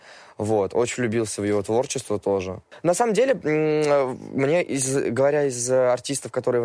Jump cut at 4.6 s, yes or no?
no